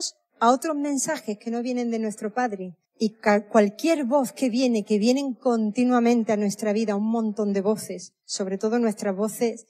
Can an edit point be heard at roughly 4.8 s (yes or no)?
no